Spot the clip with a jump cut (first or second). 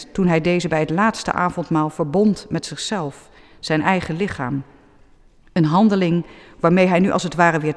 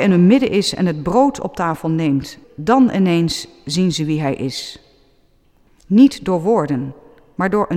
second